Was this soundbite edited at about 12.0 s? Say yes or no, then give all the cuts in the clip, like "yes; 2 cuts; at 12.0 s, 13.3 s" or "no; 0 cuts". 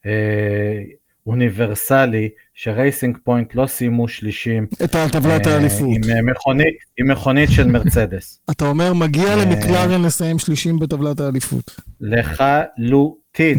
no; 0 cuts